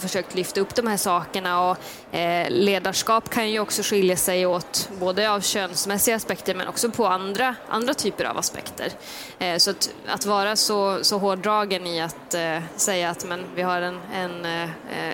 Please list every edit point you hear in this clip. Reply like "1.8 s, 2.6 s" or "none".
none